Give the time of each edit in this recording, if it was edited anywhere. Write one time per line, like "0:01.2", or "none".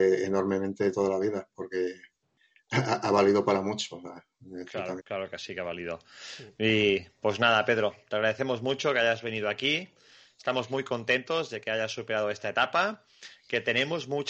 0:05.0